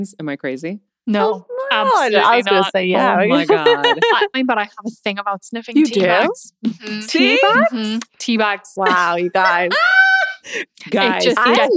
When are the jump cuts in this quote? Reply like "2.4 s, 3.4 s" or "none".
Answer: 4.3 s